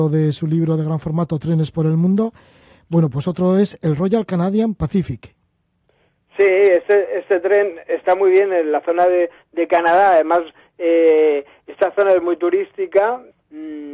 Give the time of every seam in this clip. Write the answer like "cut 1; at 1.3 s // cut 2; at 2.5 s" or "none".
none